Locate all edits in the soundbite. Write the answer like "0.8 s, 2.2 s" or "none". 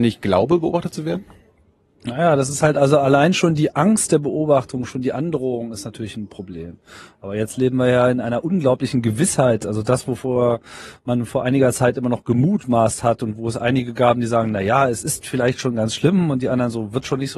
none